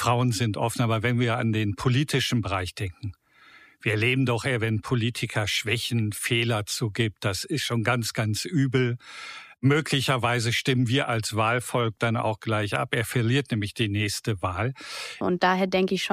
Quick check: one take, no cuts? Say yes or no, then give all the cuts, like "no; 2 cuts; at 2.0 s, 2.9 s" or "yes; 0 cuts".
no; 1 cut; at 15.2 s